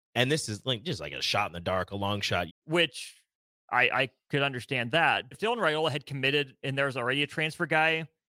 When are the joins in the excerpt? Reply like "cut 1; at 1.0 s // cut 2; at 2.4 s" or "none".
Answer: cut 1; at 2.5 s // cut 2; at 5.3 s